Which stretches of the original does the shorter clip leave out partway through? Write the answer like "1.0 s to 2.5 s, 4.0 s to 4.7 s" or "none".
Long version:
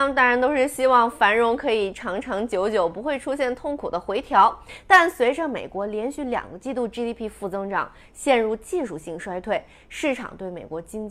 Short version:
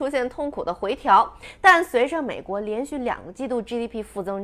none